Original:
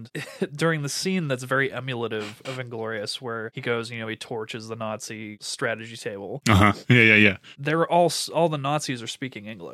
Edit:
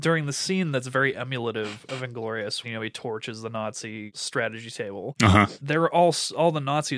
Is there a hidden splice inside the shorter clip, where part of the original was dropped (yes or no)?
yes